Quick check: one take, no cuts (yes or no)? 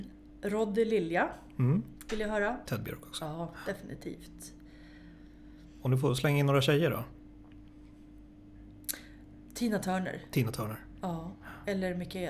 no